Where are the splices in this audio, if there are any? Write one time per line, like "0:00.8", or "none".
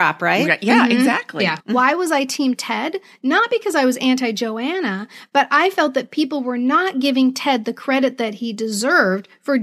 0:01.6